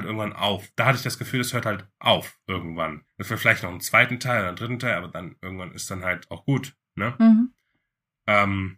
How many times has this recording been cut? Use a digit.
1